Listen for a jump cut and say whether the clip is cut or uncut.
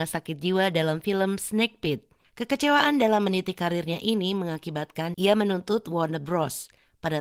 cut